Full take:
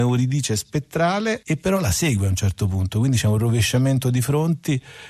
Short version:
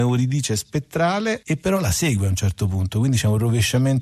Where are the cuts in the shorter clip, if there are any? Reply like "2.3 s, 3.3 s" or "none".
none